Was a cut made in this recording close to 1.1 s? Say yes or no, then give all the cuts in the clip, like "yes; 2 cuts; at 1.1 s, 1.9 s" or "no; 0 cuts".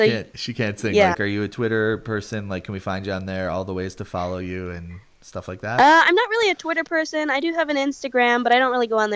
yes; 1 cut; at 1.1 s